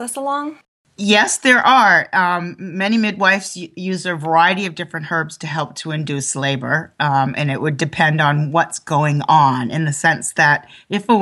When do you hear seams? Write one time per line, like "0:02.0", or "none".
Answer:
none